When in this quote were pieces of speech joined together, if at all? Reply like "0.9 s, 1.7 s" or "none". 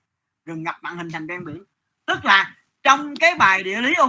none